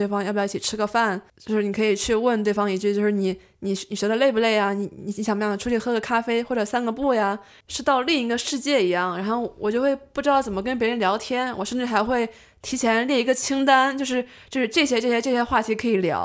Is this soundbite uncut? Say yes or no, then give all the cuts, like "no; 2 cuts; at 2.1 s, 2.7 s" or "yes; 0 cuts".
no; 2 cuts; at 1.4 s, 7.6 s